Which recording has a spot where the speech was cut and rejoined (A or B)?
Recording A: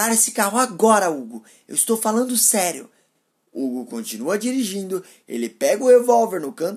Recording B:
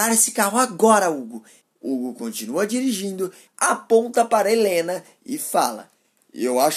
B